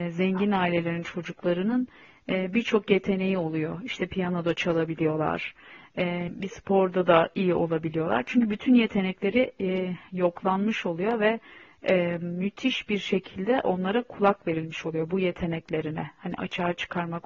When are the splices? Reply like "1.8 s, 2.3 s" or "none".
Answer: 6.3 s